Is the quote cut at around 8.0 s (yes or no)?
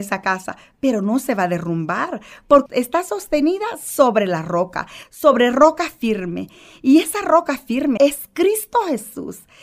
yes